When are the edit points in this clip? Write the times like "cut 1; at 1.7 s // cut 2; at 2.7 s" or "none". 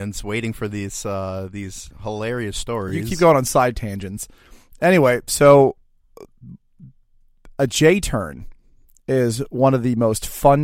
none